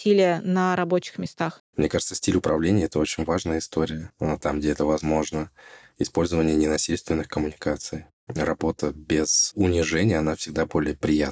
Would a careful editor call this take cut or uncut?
cut